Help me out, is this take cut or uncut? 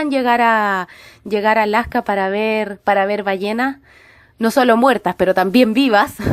uncut